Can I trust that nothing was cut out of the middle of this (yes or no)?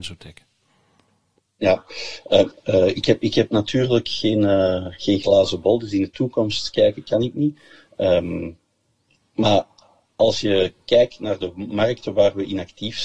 no